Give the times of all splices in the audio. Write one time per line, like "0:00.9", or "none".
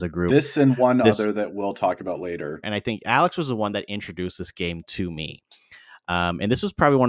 0:02.6